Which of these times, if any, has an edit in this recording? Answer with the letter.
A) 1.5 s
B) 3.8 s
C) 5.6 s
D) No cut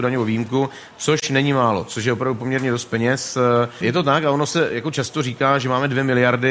B